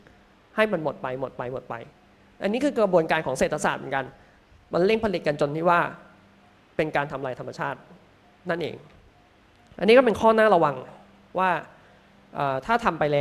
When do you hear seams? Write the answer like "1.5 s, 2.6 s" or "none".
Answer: none